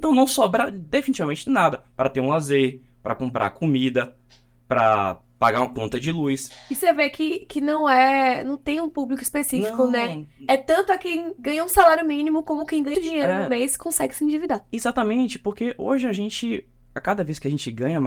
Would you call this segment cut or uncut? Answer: cut